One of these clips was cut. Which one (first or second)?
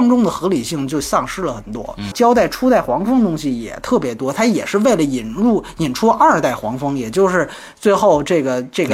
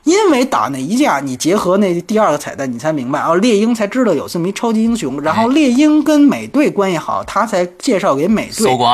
first